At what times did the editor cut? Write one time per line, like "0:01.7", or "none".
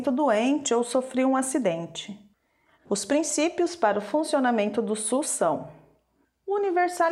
0:02.7